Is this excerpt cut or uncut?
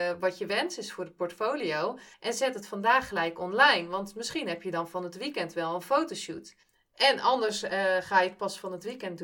uncut